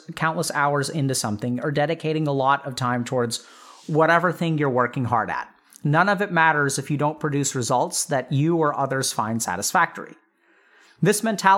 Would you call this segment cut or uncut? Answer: uncut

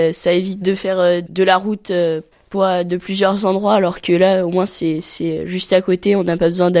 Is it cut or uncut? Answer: uncut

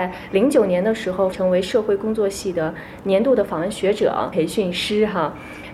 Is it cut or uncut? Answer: cut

